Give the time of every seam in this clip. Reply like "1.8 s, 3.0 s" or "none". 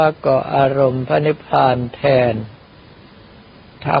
none